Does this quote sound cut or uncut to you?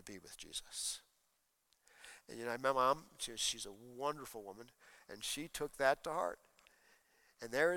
uncut